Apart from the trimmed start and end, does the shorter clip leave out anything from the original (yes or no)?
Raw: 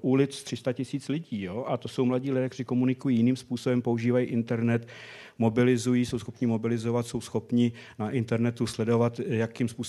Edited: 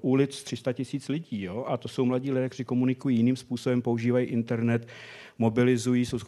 no